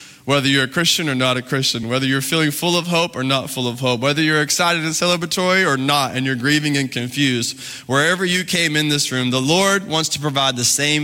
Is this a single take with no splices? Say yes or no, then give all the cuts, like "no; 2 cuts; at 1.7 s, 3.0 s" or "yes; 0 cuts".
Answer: yes; 0 cuts